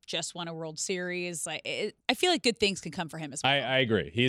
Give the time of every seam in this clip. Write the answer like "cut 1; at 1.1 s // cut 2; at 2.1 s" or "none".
cut 1; at 2.0 s